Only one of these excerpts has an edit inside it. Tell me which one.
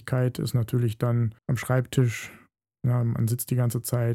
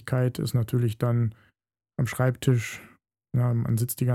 first; 1 cut; at 1.4 s

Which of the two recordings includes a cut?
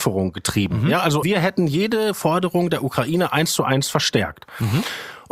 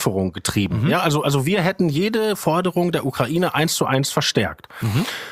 first; 1 cut; at 1.2 s

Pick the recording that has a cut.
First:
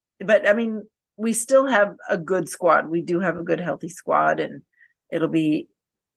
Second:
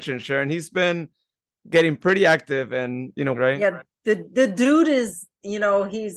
second; 1 cut; at 3.3 s

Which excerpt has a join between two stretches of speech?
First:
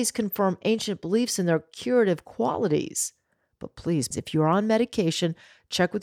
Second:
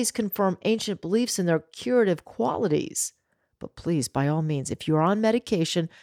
first; 1 cut; at 4.1 s

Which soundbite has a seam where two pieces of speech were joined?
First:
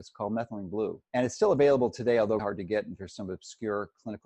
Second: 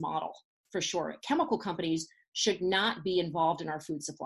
first; 2 cuts; at 1.0 s, 2.4 s

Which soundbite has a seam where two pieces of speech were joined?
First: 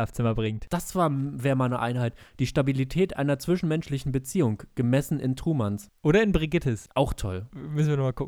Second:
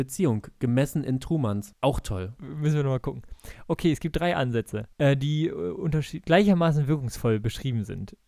second; 2 cuts; at 1.8 s, 4.9 s

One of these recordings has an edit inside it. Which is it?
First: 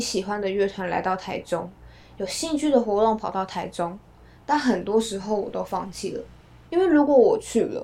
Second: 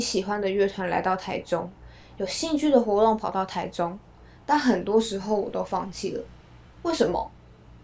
first; 1 cut; at 6.7 s

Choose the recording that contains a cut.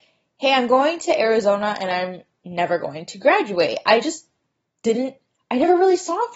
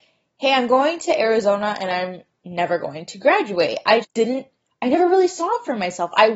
second; 1 cut; at 4.0 s

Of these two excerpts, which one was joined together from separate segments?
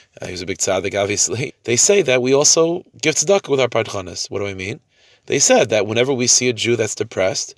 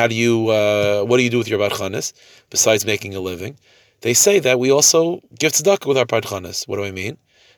first; 1 cut; at 1.5 s

